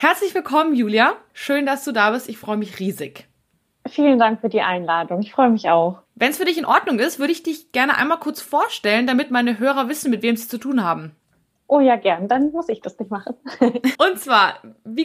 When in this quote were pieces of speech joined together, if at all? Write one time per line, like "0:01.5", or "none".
0:06.1
0:13.9